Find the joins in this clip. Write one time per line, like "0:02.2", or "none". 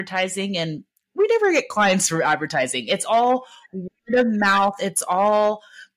none